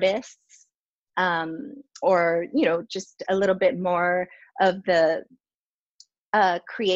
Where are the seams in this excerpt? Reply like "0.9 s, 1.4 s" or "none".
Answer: none